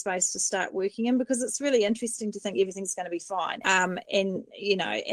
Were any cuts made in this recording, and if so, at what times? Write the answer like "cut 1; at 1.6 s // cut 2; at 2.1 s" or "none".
cut 1; at 3.6 s